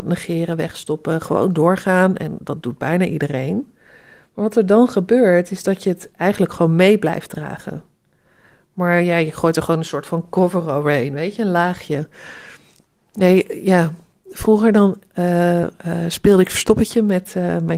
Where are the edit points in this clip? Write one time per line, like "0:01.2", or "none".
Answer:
none